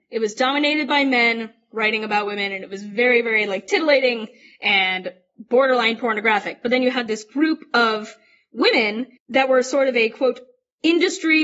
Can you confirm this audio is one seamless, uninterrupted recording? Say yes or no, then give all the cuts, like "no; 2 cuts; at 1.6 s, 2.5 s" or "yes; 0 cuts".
no; 1 cut; at 9.2 s